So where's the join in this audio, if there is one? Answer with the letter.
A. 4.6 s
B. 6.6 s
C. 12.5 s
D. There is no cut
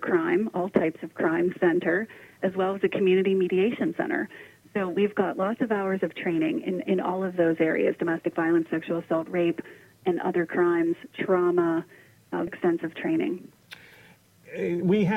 C